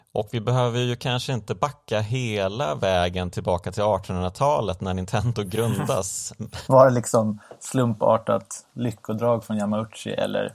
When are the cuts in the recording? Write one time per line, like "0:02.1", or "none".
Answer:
0:06.7

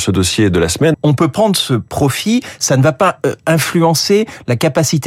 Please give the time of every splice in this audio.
0:00.9

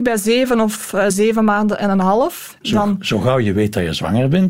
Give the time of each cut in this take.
0:01.1
0:02.6

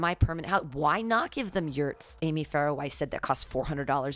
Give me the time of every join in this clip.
0:02.2

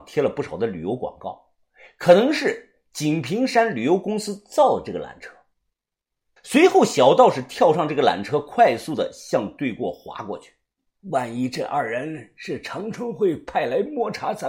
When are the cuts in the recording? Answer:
0:06.4
0:11.0

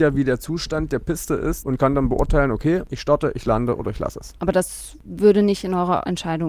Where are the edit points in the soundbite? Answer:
0:01.6

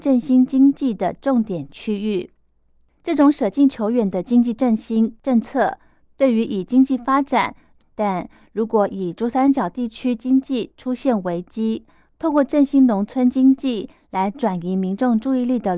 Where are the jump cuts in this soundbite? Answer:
0:07.8

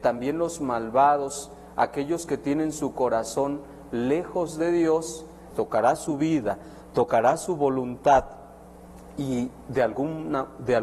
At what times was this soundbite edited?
0:05.5

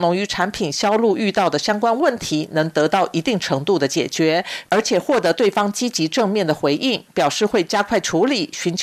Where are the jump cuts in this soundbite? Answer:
none

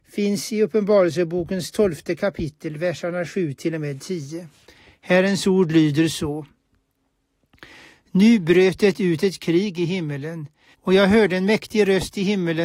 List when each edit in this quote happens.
0:10.7

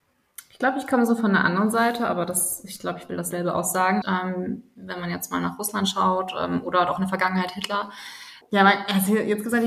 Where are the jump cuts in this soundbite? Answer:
0:04.0
0:08.4

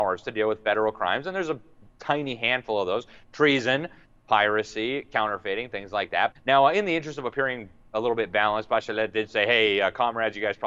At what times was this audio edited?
0:06.3

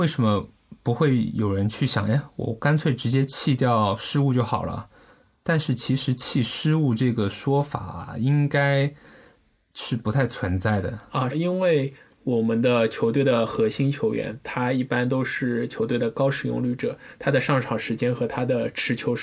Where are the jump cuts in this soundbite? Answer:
0:11.3

